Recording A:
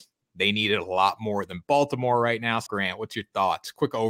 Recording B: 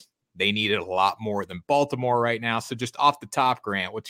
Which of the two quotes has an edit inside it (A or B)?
A